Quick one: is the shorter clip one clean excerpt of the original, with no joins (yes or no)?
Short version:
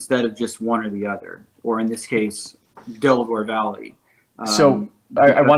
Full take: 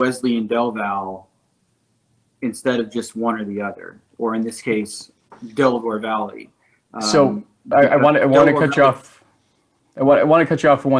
yes